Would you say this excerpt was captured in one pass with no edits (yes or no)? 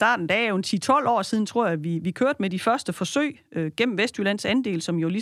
yes